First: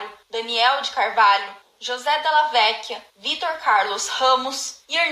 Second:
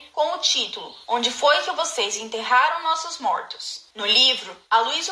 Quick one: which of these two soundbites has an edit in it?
second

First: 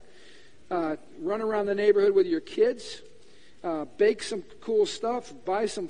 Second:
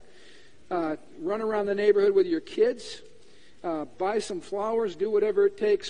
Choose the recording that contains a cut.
second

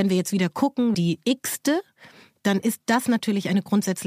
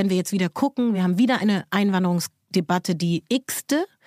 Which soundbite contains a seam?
first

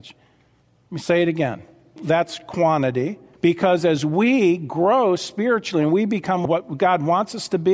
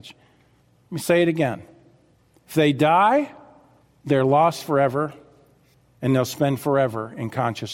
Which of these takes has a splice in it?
first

